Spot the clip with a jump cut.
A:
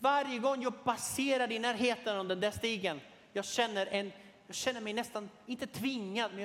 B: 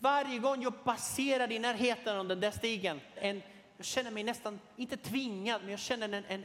B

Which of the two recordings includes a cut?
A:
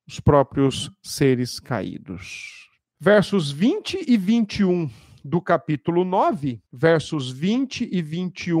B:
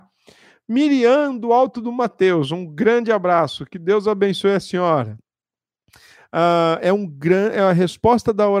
A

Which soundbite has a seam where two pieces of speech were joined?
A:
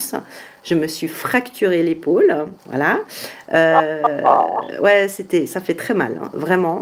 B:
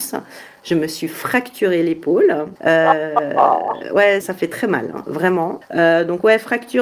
B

